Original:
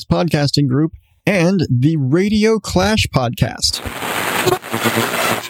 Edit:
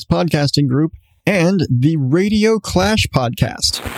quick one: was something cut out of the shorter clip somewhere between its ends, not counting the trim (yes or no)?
no